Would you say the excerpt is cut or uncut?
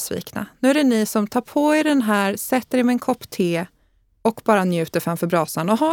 uncut